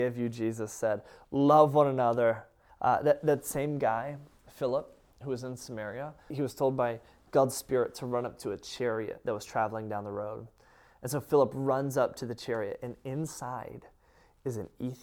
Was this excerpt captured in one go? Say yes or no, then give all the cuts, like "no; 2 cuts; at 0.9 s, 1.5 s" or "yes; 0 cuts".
no; 2 cuts; at 2.7 s, 6.3 s